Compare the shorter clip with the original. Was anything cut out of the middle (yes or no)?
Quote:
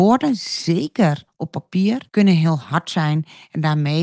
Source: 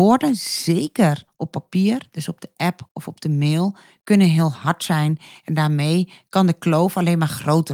yes